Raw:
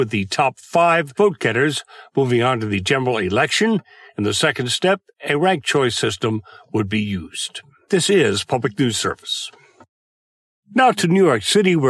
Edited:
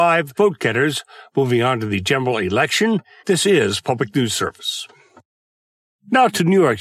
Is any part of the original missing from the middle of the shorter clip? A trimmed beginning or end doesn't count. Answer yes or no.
yes